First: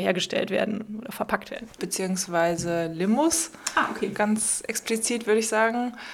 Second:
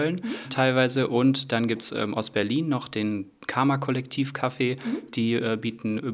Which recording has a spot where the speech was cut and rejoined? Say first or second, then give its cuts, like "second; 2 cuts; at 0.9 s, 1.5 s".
first; 1 cut; at 1.8 s